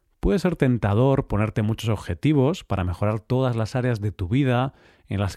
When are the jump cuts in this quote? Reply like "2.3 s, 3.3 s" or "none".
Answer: none